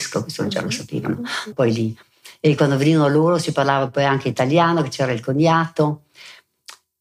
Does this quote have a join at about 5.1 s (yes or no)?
no